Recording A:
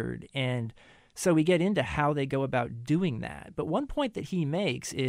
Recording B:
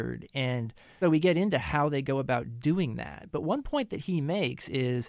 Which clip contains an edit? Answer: B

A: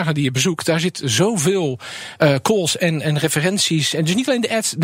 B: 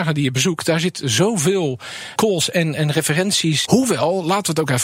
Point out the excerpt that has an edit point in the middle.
B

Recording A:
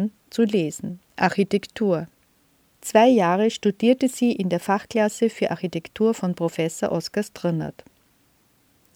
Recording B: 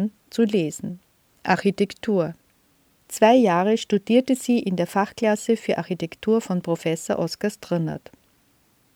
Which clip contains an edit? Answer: A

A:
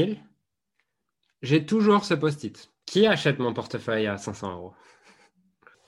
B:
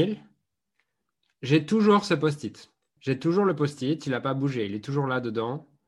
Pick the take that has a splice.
A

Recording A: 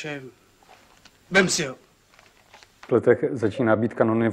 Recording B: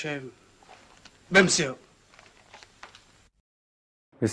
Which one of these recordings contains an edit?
A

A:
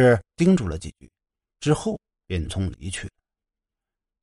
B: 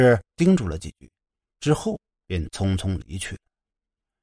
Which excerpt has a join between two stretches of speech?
A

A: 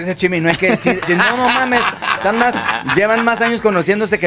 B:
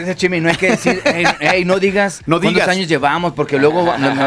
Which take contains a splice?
A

